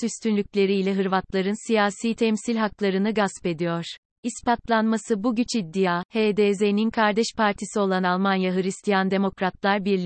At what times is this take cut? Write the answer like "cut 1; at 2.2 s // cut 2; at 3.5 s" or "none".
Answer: cut 1; at 4.2 s